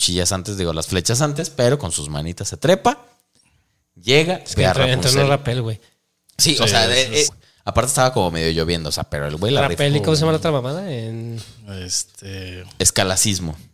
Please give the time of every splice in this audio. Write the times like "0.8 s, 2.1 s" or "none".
7.3 s